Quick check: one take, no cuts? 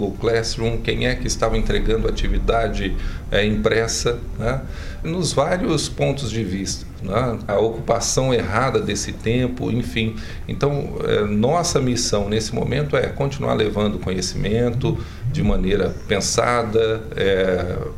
no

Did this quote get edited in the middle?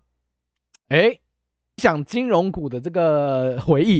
yes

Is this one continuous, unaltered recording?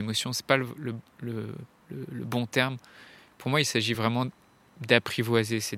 yes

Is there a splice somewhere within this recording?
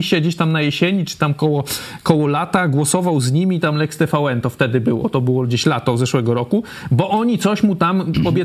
no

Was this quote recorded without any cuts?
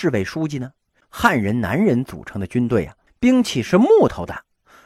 no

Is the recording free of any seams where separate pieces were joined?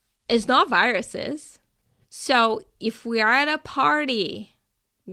no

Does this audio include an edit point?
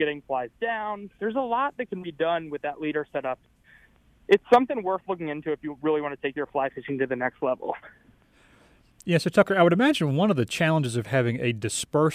yes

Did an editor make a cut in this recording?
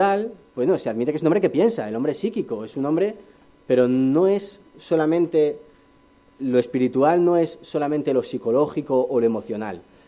no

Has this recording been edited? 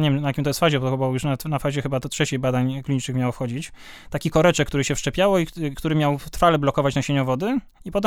no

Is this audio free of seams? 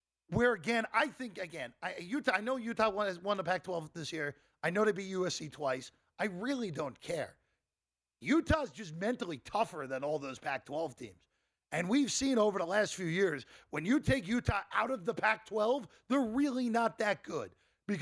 yes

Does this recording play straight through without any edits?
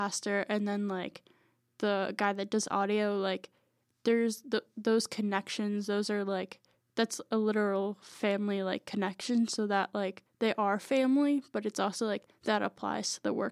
yes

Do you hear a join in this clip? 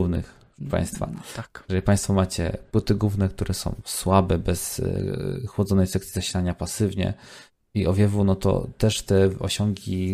no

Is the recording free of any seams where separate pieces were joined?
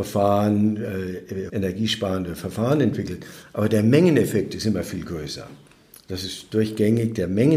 no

